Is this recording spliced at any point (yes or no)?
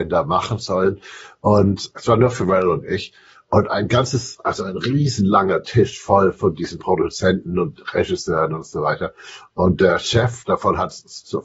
no